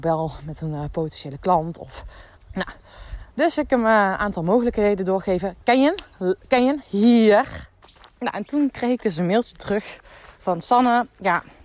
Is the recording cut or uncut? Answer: cut